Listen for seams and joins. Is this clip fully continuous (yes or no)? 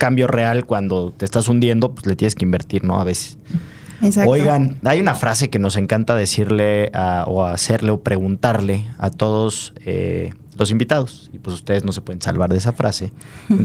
yes